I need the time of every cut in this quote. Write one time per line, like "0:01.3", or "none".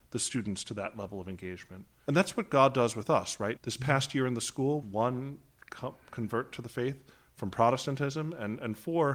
0:02.1
0:03.6
0:04.8